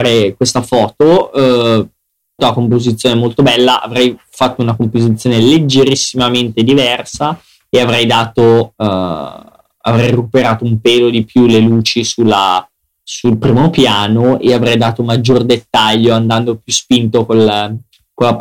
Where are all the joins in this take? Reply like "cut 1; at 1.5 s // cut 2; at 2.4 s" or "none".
cut 1; at 2.4 s